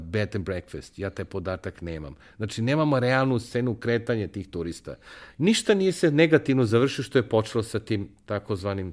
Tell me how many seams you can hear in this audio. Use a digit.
1